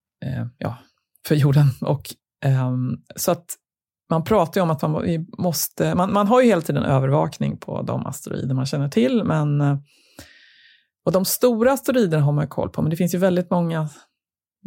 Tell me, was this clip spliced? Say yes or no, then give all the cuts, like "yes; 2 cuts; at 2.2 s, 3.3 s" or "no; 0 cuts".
no; 0 cuts